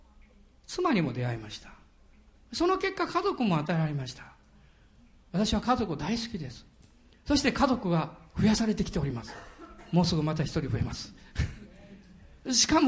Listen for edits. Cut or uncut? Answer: uncut